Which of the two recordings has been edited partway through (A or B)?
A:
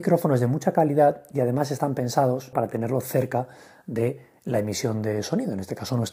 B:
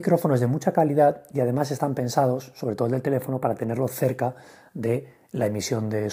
A